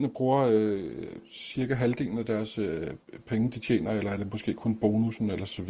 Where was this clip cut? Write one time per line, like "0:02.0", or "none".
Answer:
none